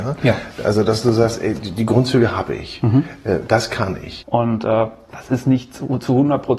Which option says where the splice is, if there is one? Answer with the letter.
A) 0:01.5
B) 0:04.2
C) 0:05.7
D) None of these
B